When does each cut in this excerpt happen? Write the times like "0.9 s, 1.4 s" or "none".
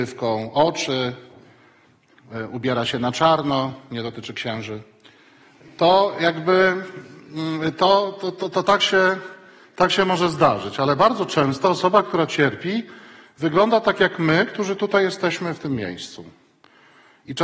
none